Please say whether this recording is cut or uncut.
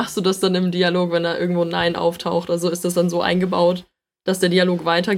uncut